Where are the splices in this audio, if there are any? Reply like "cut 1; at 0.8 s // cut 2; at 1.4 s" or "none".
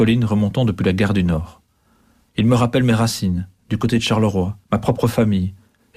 cut 1; at 2.3 s // cut 2; at 4.6 s